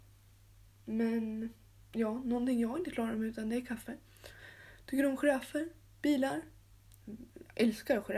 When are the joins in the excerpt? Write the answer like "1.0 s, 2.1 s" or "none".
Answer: none

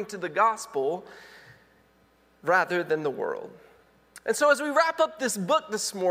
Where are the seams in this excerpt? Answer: none

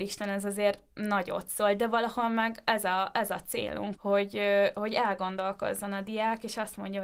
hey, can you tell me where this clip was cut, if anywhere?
4.0 s

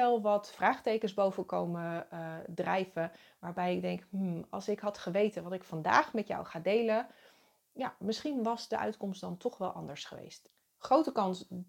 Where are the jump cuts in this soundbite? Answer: none

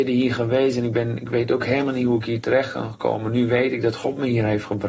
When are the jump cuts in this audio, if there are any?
none

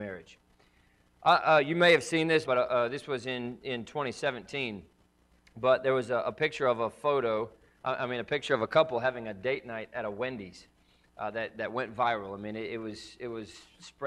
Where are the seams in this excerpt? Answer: 2.5 s

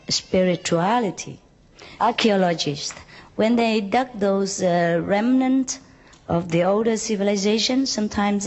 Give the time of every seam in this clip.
2.0 s

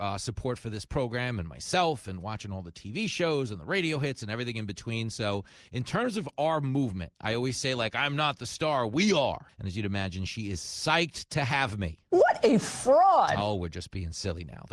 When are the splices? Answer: 9.5 s

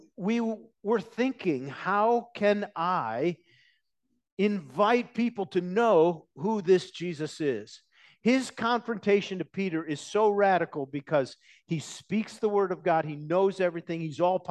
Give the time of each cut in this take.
none

